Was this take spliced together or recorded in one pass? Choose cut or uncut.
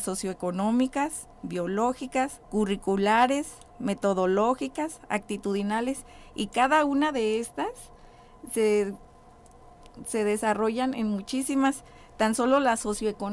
cut